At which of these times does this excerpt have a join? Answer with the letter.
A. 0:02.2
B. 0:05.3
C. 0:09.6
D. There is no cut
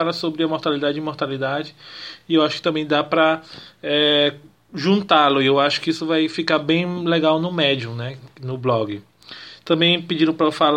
D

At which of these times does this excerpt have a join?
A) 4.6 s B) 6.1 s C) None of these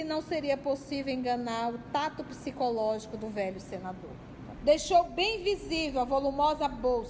A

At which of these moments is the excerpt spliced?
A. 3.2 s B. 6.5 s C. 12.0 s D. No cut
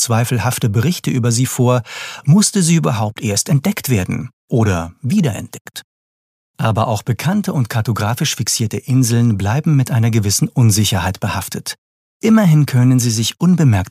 D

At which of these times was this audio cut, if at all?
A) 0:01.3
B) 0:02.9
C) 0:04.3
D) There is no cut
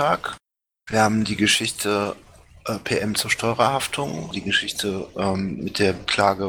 C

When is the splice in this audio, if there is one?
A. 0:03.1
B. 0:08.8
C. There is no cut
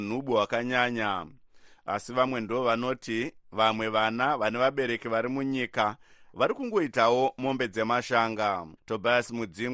B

